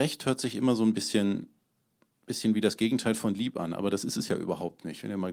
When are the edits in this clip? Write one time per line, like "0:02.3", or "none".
none